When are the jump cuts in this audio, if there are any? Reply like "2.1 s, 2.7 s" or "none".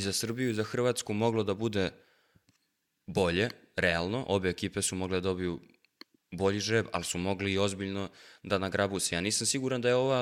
none